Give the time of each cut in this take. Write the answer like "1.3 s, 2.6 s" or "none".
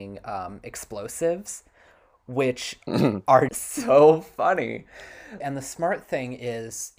3.5 s, 5.4 s